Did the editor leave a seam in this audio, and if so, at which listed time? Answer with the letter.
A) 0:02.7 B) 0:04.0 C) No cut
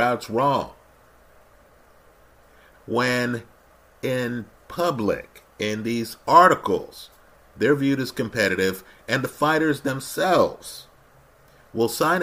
A